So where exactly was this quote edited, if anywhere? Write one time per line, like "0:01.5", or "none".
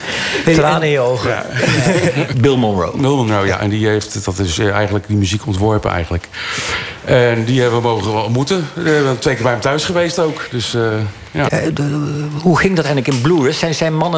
0:02.3
0:11.5